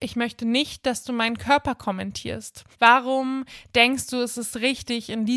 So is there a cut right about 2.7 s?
yes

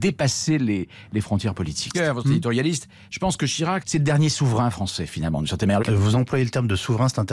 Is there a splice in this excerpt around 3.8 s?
yes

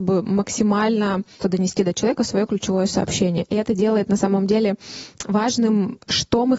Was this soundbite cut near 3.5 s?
no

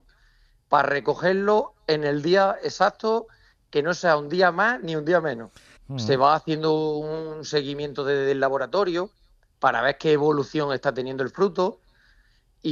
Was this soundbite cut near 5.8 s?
yes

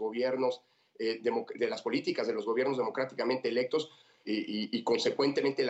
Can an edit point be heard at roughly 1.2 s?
no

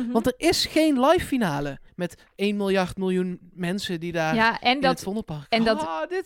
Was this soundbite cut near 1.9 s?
yes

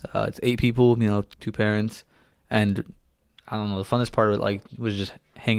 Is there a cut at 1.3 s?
yes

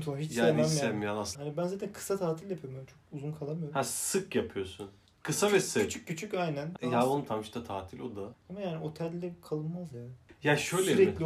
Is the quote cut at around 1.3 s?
yes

